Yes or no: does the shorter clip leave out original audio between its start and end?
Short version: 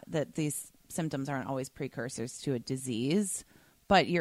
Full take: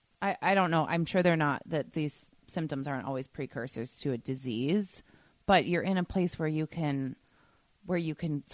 no